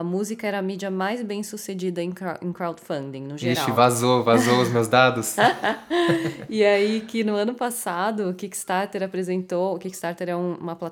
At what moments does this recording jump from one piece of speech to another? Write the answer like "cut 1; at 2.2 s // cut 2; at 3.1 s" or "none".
none